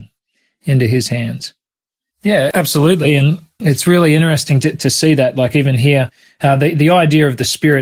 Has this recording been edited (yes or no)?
yes